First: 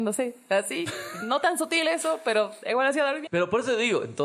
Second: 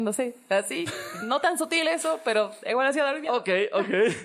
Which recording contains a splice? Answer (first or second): first